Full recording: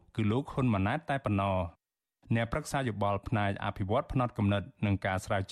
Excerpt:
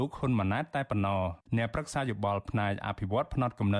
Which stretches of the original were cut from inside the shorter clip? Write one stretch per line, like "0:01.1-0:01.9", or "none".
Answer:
0:01.8-0:02.2